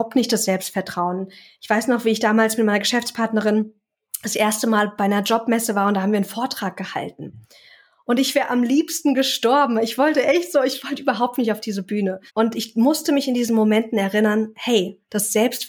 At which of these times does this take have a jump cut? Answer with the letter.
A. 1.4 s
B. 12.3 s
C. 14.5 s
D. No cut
B